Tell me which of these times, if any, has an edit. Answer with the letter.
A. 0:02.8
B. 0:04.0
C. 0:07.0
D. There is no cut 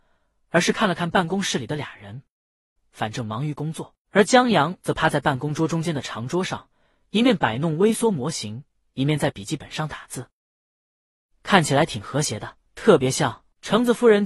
A